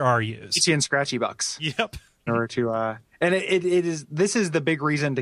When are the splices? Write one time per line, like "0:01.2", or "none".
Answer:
0:02.3